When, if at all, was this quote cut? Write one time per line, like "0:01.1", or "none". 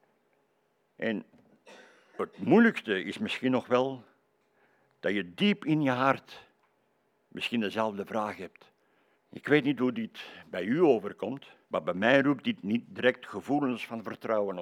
0:09.1
0:11.6